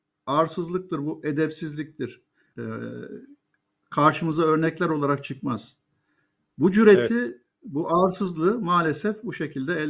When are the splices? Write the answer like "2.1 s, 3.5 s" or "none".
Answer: 2.5 s